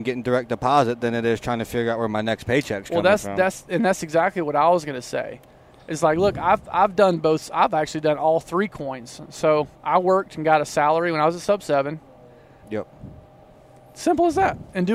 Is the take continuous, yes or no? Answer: no